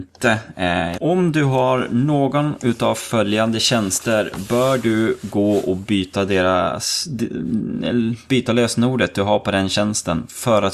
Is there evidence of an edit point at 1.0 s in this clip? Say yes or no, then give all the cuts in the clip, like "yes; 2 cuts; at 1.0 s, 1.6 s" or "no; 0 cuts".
yes; 1 cut; at 1.0 s